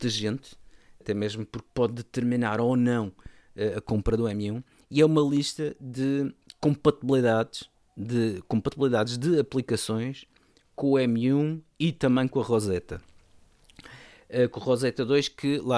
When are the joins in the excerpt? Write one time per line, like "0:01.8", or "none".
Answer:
0:01.0